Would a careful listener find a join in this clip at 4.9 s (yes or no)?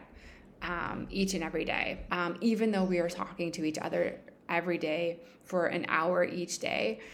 no